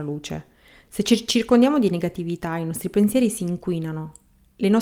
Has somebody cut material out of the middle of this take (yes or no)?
no